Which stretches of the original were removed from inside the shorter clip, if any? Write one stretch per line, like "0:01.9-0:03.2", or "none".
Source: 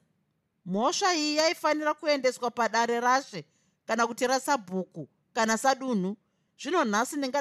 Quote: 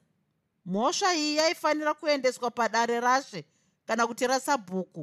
none